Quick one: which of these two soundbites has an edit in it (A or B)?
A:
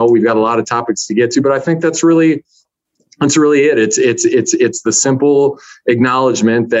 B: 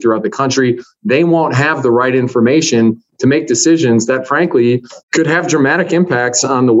B